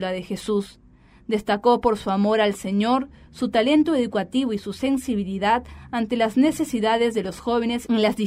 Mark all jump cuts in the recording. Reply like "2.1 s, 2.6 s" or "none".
none

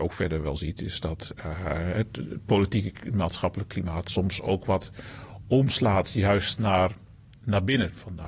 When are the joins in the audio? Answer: none

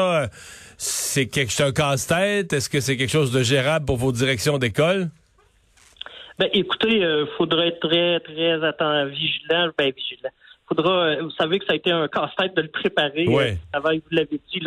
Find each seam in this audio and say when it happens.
none

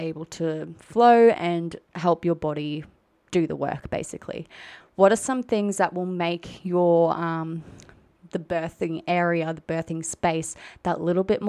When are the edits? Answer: 4.8 s

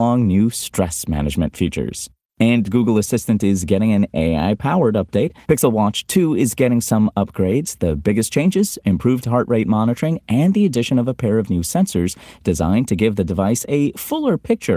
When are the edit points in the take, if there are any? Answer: 5.4 s

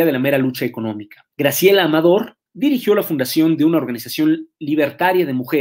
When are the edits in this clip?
1.3 s, 2.5 s

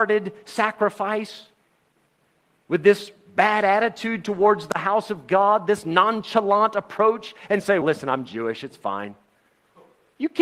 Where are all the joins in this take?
7.8 s

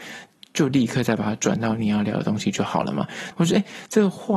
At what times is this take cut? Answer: 3.3 s

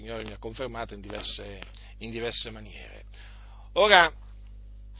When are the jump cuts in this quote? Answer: none

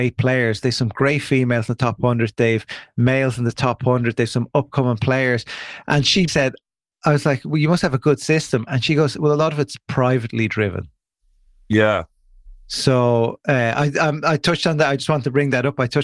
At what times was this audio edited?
6.3 s

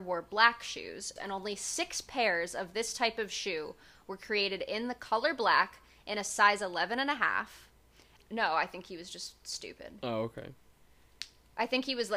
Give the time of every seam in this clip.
1.2 s, 8.2 s

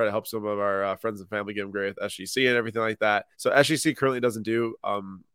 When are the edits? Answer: 3.3 s

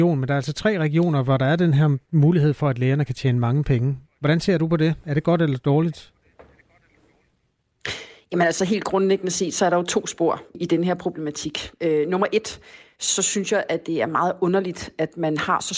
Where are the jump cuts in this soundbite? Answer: 10.5 s

